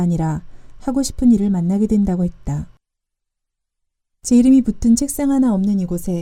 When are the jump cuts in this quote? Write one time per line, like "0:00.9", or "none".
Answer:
none